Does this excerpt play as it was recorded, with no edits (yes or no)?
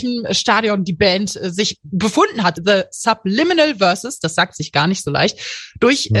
no